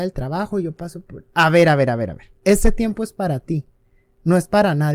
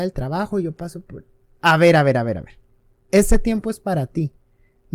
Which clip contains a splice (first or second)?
first